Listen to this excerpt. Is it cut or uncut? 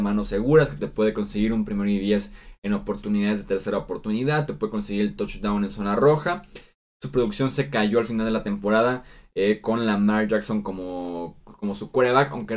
uncut